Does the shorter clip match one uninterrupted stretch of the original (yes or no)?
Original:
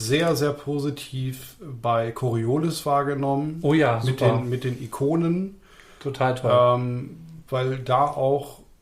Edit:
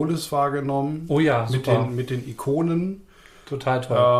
yes